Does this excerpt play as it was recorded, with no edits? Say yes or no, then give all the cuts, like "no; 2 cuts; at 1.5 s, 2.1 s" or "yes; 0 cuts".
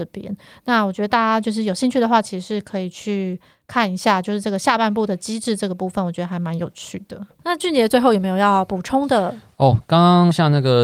yes; 0 cuts